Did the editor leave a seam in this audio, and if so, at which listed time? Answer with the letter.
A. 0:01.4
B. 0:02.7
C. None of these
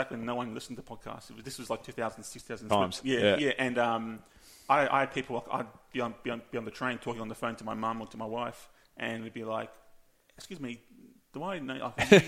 B